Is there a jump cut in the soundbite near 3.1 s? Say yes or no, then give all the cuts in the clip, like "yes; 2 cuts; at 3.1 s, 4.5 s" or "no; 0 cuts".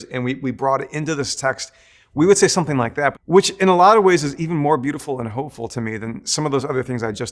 yes; 1 cut; at 3.1 s